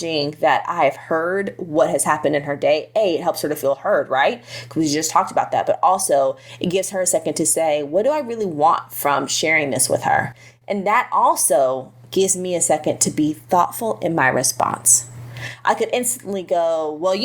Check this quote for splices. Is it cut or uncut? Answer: uncut